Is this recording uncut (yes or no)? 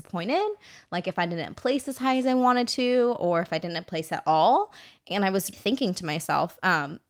no